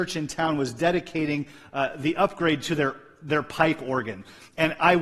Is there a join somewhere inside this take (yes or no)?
no